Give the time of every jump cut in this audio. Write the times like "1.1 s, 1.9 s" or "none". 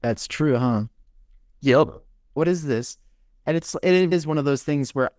2.4 s, 4.1 s